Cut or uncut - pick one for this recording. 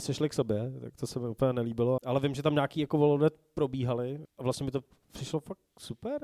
cut